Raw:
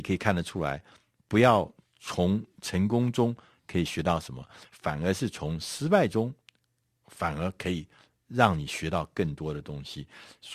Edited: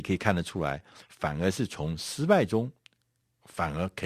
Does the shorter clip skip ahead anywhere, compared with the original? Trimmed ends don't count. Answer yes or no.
yes